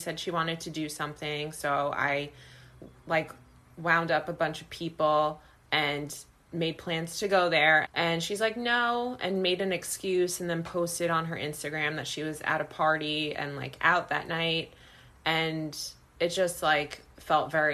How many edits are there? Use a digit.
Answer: 1